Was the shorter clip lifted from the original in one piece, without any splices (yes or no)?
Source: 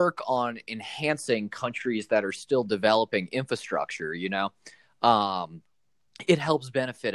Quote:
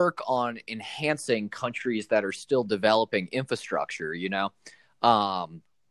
yes